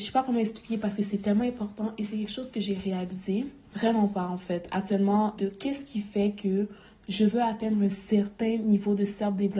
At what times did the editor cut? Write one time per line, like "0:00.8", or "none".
0:03.7
0:05.4